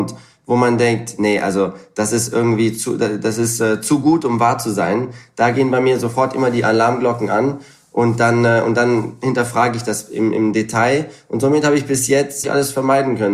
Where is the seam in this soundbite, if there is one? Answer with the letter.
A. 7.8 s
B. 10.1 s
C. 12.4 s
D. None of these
C